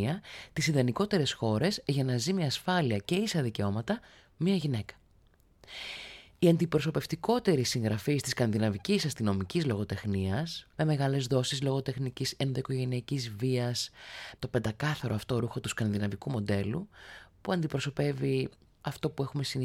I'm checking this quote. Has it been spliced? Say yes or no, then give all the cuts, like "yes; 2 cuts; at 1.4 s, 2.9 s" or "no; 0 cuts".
yes; 2 cuts; at 10.7 s, 14.4 s